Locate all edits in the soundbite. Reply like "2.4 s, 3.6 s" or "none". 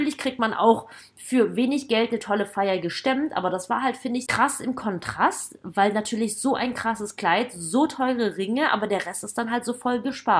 4.3 s